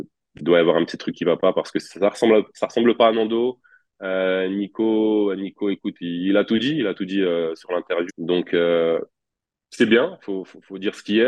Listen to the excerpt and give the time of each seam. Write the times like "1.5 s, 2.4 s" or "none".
8.1 s

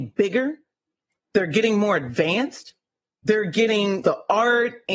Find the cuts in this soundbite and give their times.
4.0 s

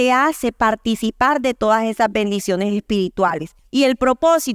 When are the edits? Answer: 3.6 s

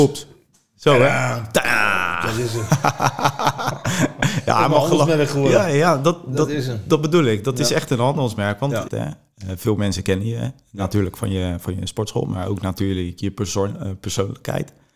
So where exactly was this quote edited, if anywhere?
8.9 s

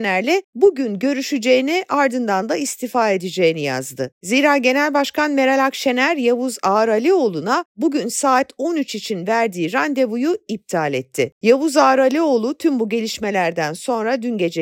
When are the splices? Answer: 4.1 s, 11.3 s

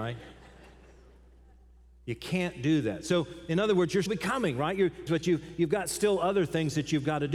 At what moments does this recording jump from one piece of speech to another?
4.1 s, 5.1 s

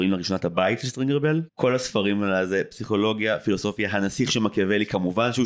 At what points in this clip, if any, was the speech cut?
1.5 s

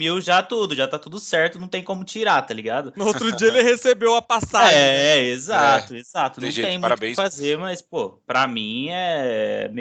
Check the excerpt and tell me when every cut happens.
none

